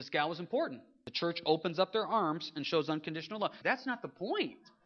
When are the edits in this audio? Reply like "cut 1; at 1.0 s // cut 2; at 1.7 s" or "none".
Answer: cut 1; at 3.6 s